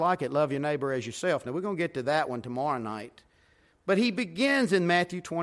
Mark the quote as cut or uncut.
uncut